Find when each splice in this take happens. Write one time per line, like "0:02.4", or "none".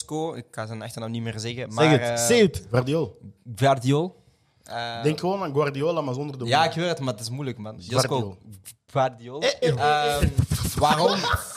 0:09.6

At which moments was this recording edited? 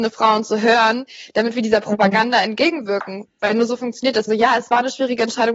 0:04.3

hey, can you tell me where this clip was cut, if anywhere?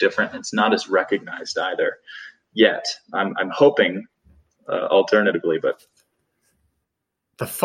none

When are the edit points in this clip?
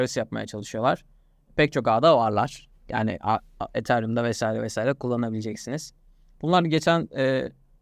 0:03.7
0:06.3

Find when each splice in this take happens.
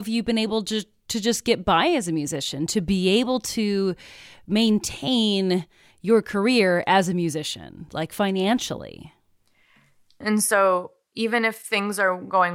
0:10.2

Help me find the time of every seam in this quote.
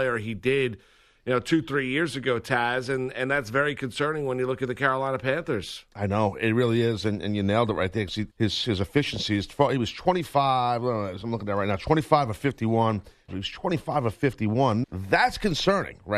0:08.3
0:13.3
0:14.8

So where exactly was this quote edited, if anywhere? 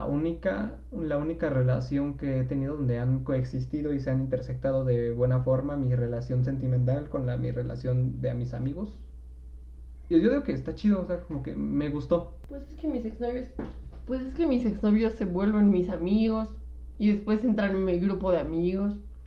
none

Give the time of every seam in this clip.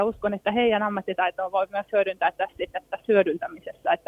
none

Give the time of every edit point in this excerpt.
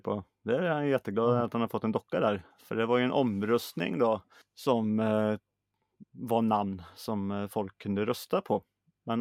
0:04.4
0:06.0

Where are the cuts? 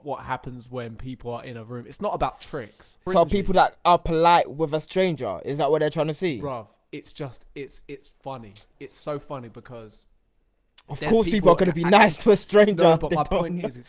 0:03.1

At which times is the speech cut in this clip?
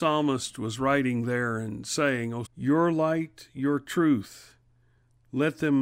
0:02.4

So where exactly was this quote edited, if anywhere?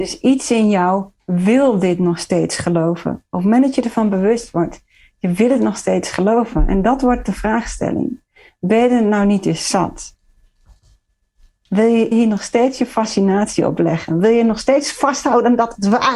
0:12.1

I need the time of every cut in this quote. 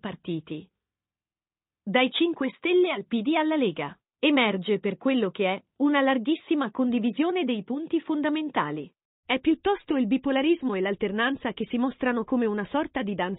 none

